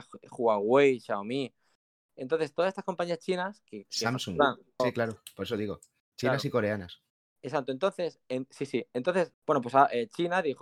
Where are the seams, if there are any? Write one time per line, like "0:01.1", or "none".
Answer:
0:04.8
0:09.3